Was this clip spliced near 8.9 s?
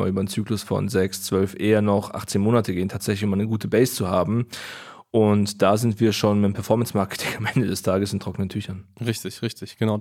no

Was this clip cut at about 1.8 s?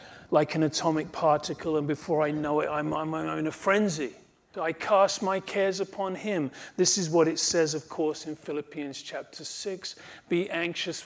no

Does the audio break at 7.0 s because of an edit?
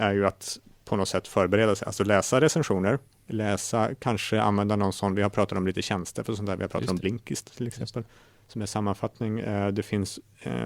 no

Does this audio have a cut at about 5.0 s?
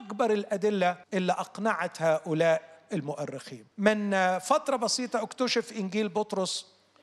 no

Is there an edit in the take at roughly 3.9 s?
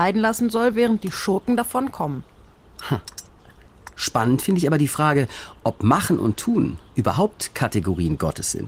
yes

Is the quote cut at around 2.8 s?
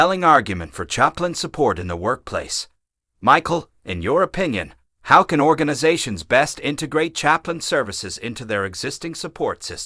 no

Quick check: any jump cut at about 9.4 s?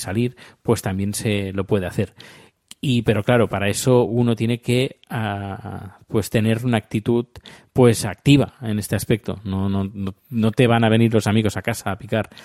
no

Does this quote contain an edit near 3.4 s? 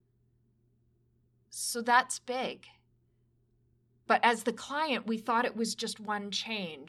no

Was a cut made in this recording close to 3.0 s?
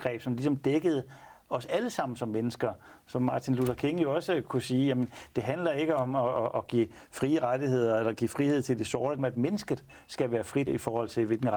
no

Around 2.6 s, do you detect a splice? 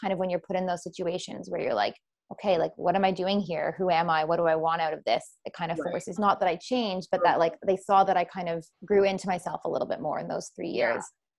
no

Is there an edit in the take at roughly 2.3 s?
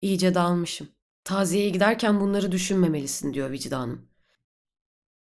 no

